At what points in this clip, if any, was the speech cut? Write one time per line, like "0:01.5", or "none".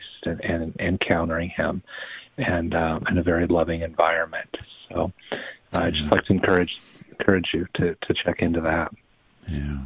none